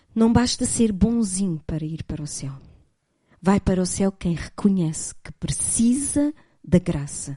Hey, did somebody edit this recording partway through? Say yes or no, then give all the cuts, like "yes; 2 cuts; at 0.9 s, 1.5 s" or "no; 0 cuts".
no; 0 cuts